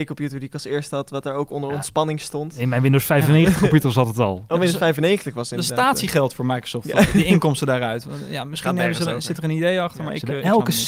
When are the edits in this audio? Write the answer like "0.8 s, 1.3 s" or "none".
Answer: none

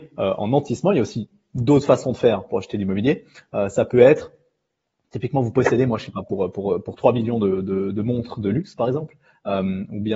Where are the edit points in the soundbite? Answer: none

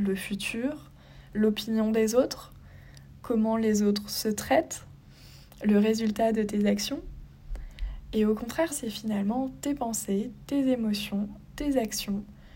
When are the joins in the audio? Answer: 8.7 s

